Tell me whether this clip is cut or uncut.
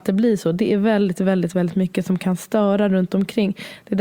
uncut